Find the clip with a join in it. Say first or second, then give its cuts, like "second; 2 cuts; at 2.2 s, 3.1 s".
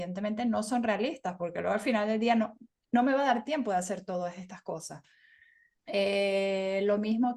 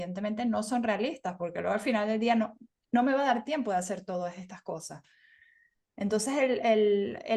first; 1 cut; at 5.8 s